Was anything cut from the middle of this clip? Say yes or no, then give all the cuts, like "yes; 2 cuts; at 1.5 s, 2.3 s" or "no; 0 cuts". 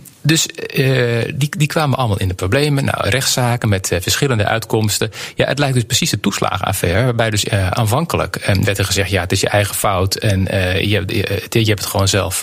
yes; 1 cut; at 3.0 s